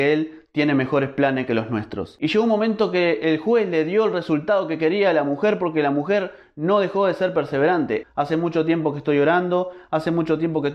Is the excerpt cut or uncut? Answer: cut